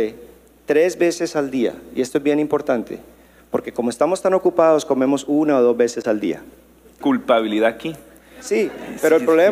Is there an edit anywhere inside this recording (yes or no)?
yes